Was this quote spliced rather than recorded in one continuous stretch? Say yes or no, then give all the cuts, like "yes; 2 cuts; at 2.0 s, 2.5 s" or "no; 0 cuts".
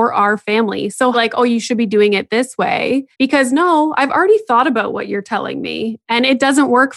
yes; 2 cuts; at 1.1 s, 3.1 s